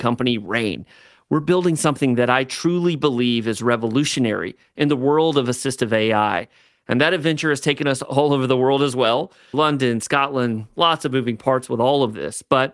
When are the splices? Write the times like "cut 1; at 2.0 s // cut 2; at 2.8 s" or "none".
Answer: cut 1; at 9.5 s